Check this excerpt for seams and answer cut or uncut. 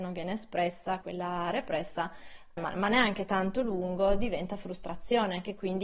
cut